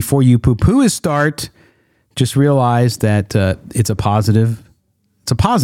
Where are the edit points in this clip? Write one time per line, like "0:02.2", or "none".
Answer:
none